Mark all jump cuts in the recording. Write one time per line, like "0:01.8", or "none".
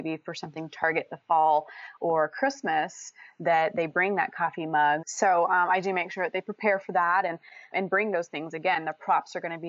0:05.0
0:07.7